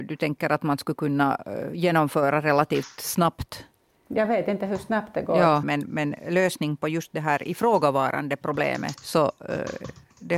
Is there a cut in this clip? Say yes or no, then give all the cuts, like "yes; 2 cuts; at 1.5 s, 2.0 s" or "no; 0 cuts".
yes; 2 cuts; at 5.6 s, 8.9 s